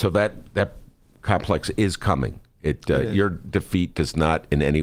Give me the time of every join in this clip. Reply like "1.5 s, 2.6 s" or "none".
none